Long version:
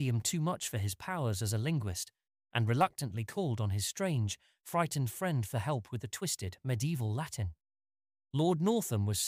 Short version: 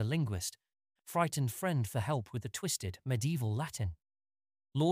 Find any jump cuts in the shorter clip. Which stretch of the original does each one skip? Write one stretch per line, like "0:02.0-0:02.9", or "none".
0:02.5-0:04.5